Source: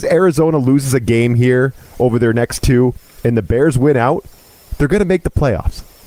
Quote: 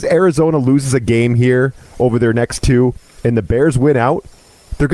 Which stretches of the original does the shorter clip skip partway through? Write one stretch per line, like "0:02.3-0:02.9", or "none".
none